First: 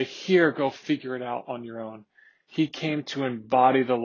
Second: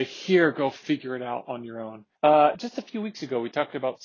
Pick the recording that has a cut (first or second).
second